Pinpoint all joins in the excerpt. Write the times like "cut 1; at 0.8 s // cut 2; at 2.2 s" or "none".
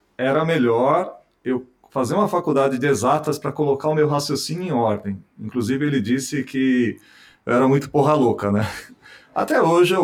none

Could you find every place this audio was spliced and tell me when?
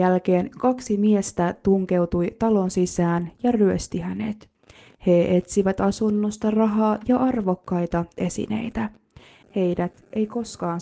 cut 1; at 9.4 s

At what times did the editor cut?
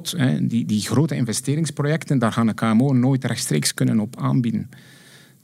none

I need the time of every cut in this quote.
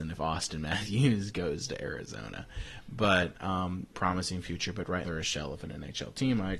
cut 1; at 3.9 s // cut 2; at 5.0 s

